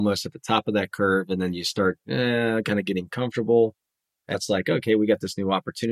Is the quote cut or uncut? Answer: cut